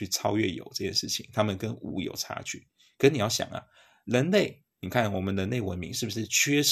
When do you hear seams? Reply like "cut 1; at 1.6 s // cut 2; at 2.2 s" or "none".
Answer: none

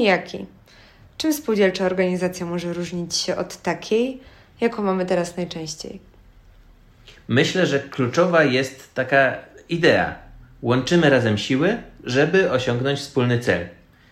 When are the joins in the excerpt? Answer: none

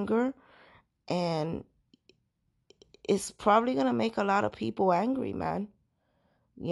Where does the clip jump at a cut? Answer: none

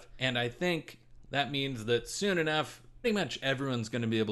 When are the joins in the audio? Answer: cut 1; at 1.2 s // cut 2; at 3.0 s

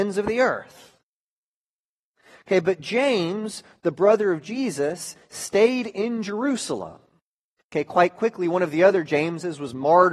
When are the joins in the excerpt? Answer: cut 1; at 7.6 s

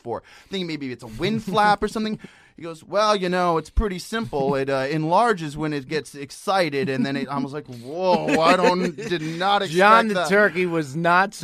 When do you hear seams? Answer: none

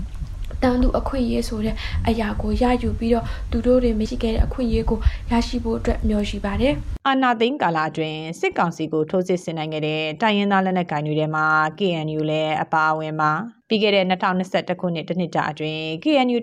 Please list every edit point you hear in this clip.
cut 1; at 4.1 s // cut 2; at 13.6 s

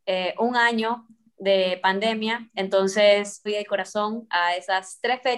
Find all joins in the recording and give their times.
cut 1; at 3.5 s

